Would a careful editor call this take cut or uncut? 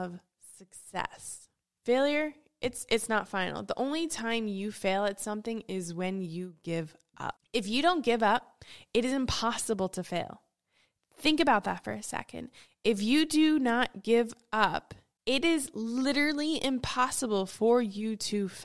uncut